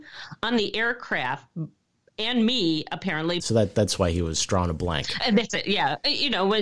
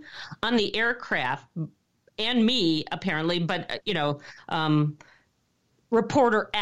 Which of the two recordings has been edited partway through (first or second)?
first